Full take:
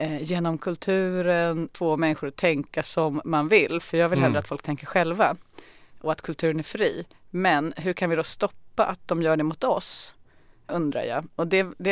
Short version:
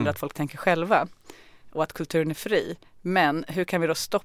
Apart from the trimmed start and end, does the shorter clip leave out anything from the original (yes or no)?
no